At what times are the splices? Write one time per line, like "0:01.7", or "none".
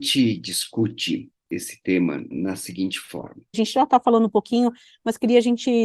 0:02.3
0:03.5